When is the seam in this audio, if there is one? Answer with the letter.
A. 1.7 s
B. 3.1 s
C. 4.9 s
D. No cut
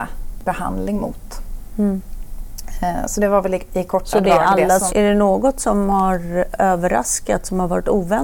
C